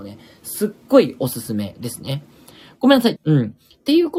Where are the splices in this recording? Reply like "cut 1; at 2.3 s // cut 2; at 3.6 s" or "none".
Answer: cut 1; at 3.2 s